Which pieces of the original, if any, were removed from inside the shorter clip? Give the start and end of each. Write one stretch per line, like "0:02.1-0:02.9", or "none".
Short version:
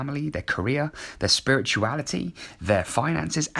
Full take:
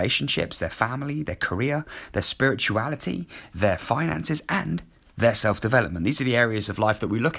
none